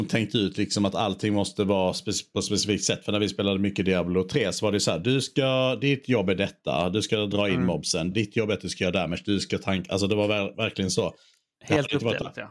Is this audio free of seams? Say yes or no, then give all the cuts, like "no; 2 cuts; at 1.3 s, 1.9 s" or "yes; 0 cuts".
no; 1 cut; at 8.1 s